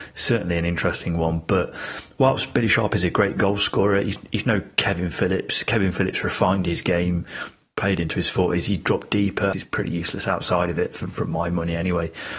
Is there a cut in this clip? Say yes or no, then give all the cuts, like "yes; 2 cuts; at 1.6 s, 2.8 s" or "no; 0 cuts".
yes; 1 cut; at 9.5 s